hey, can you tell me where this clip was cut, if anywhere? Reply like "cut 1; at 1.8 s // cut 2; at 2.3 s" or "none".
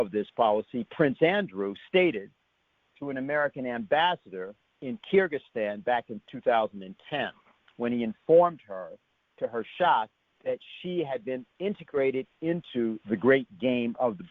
none